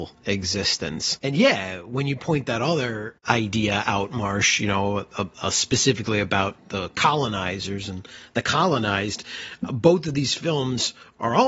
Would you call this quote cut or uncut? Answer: uncut